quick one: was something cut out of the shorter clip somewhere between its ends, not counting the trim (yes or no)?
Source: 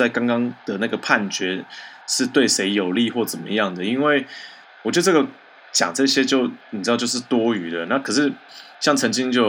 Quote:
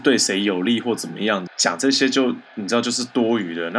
yes